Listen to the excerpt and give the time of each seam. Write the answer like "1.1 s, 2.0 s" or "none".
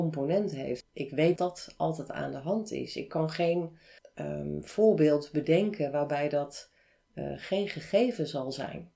1.4 s